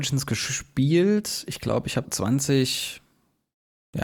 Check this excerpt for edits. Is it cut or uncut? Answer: cut